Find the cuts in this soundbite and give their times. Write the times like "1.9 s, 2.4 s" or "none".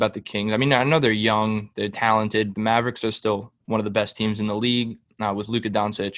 2.5 s